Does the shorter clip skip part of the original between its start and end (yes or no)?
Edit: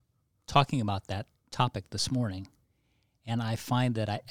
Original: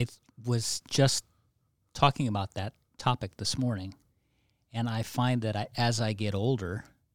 no